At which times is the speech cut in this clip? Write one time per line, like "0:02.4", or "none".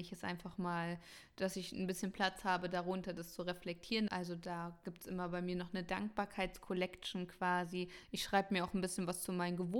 0:04.1